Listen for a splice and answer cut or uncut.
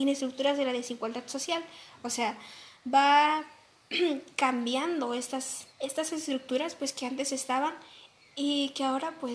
cut